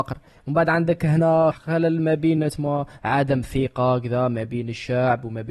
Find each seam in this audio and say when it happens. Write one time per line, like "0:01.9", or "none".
0:01.5